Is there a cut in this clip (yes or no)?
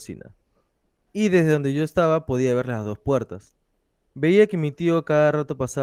yes